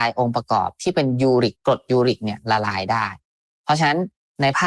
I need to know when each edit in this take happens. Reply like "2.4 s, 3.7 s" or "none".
1.5 s